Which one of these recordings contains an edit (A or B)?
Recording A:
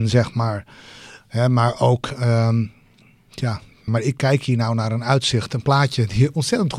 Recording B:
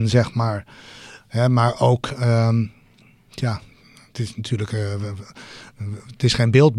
A